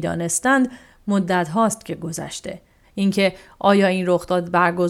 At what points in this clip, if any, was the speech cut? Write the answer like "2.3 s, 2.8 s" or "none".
2.8 s